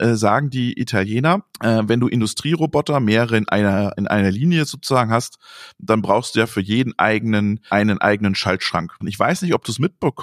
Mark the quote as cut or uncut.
cut